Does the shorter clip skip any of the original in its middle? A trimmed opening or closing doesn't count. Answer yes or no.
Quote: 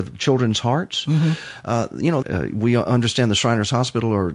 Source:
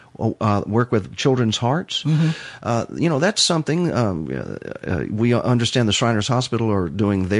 yes